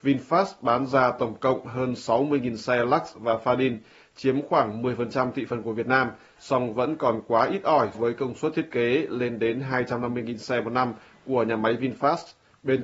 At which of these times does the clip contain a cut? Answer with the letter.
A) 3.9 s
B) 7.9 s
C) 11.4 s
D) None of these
B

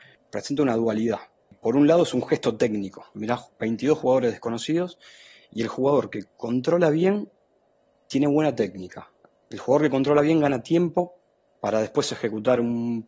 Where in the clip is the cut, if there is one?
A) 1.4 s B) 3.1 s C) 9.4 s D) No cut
B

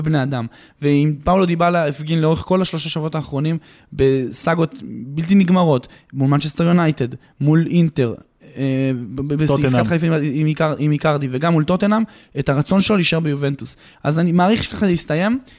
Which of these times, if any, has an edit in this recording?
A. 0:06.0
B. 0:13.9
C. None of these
B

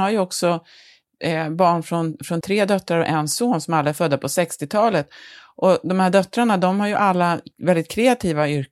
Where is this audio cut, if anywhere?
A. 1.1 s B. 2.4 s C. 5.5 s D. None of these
B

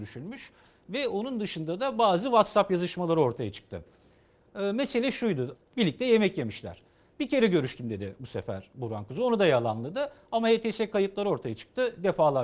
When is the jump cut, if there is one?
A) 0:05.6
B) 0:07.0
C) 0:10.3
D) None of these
A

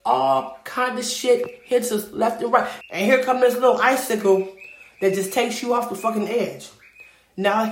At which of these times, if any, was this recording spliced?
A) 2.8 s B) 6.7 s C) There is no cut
A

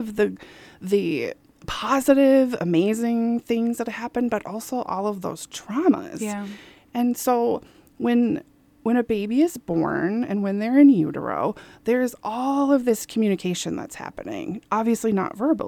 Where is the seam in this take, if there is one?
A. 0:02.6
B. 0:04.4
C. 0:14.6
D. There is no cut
D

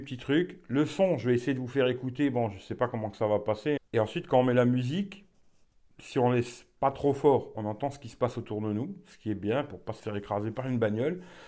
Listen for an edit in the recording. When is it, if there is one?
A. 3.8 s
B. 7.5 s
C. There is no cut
A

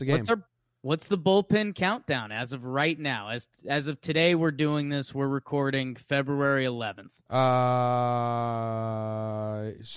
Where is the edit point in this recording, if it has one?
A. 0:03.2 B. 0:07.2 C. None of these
B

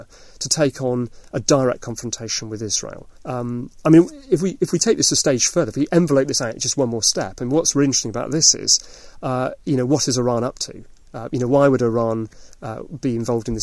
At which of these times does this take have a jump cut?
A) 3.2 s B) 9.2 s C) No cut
A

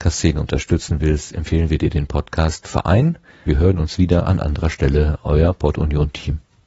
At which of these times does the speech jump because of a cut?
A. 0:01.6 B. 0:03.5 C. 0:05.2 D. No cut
B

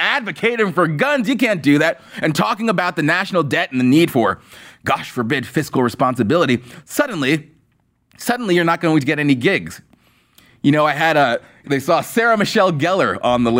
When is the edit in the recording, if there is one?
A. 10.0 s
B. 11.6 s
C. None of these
B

